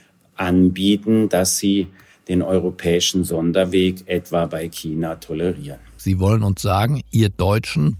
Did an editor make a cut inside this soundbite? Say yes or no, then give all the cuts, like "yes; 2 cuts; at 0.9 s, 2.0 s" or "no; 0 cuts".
yes; 1 cut; at 6.0 s